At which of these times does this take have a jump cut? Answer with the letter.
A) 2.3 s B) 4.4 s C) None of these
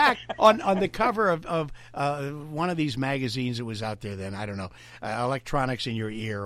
C